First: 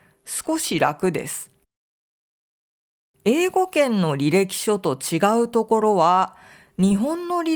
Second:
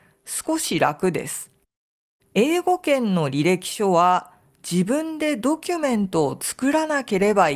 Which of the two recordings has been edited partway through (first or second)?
second